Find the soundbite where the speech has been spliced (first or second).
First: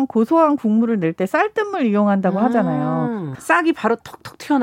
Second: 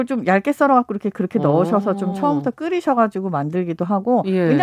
first